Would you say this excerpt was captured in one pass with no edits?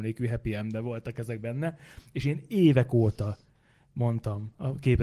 yes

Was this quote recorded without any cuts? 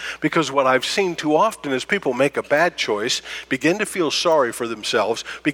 yes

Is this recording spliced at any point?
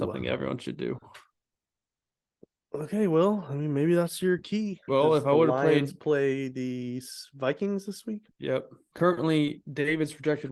yes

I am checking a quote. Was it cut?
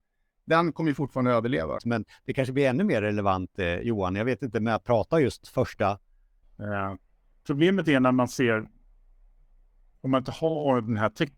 yes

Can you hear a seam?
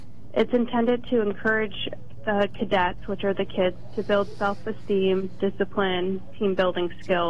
no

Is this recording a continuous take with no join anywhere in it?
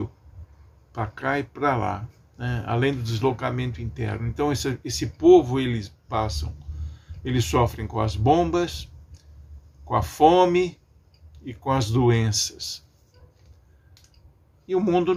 yes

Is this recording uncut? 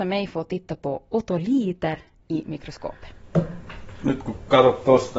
yes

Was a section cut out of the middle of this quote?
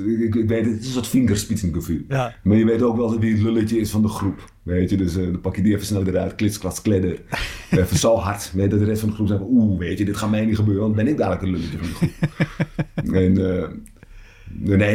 yes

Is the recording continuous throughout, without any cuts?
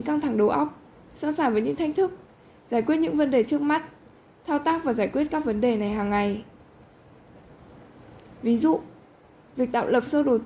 yes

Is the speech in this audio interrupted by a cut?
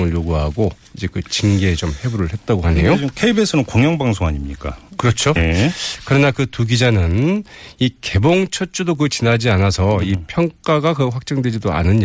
yes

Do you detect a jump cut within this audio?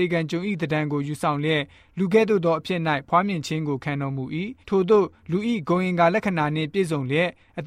yes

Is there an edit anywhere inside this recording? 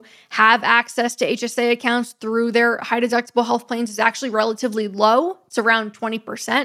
no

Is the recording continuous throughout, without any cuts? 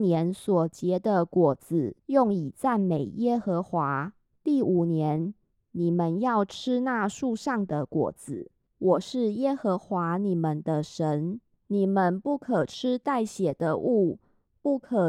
no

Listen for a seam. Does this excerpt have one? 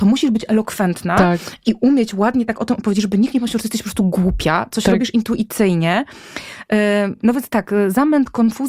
no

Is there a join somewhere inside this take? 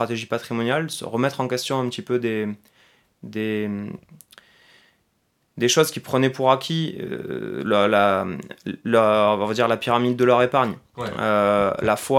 no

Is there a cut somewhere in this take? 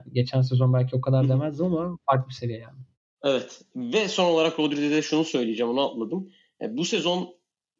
no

